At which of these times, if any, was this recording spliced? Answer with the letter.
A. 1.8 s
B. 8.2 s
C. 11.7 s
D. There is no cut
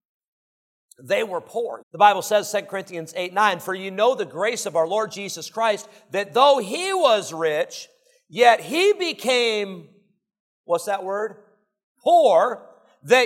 A